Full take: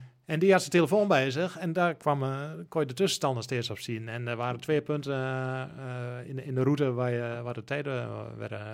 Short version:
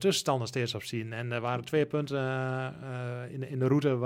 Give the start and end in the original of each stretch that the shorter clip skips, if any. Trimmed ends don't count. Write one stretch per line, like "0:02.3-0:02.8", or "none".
none

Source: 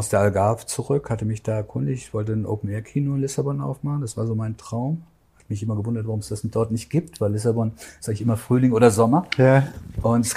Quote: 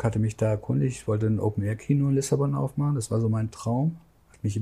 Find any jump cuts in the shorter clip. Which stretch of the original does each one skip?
none

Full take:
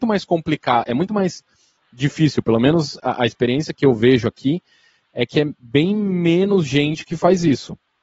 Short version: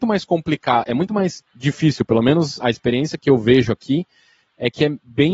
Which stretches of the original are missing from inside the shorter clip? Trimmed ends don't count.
0:01.5-0:01.8
0:03.0-0:03.2

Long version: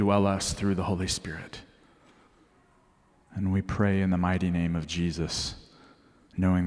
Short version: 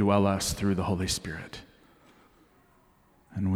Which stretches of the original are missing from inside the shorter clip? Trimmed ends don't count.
none

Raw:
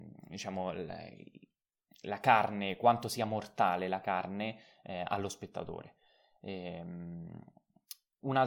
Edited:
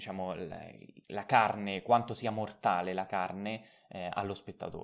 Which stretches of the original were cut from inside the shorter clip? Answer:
0:01.4-0:02.0

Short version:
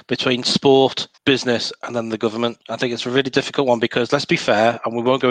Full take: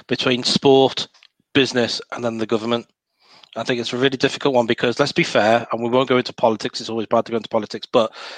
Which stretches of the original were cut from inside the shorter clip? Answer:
0:01.2-0:01.5
0:02.9-0:03.5

